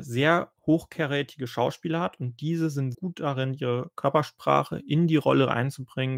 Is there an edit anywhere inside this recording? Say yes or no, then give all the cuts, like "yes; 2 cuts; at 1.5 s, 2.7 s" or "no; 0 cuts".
yes; 1 cut; at 2.9 s